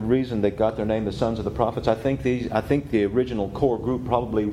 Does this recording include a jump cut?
no; 0 cuts

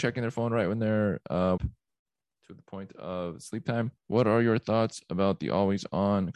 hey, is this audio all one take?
no; 2 cuts; at 1.6 s, 4.0 s

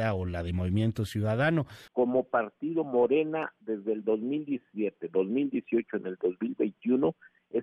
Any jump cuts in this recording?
yes; 1 cut; at 1.9 s

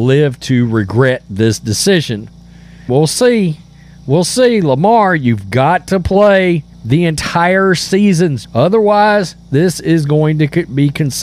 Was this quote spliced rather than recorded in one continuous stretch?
yes; 3 cuts; at 2.9 s, 6.7 s, 8.4 s

